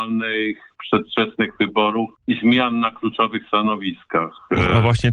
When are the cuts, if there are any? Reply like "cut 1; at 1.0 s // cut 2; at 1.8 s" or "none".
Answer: cut 1; at 2.2 s